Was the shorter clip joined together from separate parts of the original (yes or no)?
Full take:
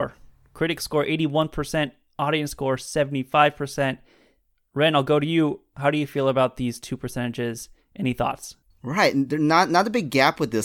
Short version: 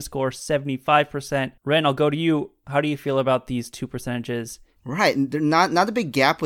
yes